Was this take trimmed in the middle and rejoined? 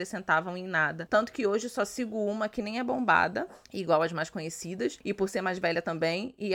yes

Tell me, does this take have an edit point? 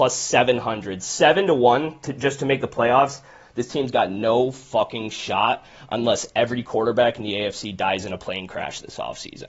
no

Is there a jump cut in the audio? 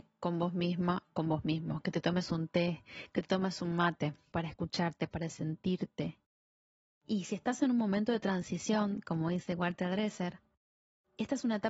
yes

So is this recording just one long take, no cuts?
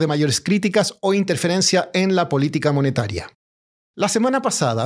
yes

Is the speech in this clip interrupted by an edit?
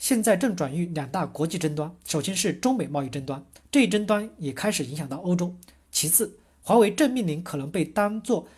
no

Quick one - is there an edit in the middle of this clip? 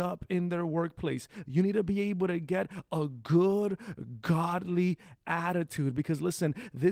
yes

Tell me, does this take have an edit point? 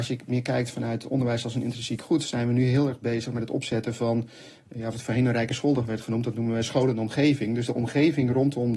no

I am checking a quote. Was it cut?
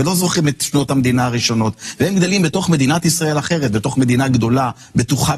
no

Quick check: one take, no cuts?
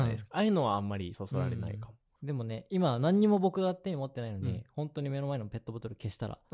yes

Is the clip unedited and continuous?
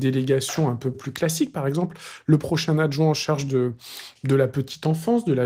yes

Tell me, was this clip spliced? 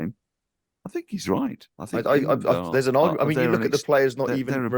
yes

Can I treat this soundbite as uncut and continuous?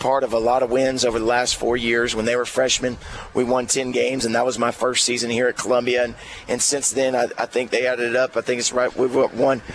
yes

